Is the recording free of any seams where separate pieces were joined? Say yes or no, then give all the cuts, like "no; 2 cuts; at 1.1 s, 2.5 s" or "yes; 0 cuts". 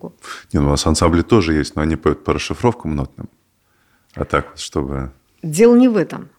yes; 0 cuts